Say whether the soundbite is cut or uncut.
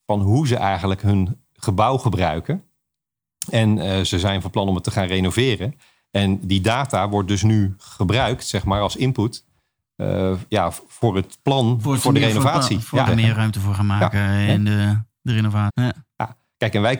cut